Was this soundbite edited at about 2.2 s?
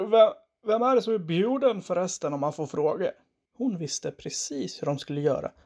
no; 1 cut; at 3.5 s

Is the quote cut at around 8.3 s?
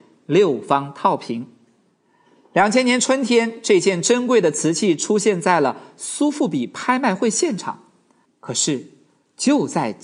yes; 1 cut; at 8.3 s

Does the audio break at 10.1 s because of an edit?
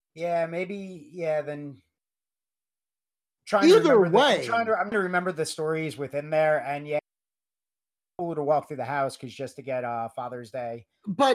no; 1 cut; at 4.9 s

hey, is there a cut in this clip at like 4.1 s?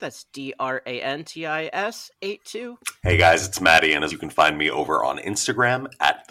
yes; 1 cut; at 4.1 s

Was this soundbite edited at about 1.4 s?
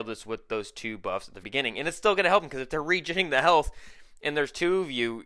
yes; 1 cut; at 1.4 s

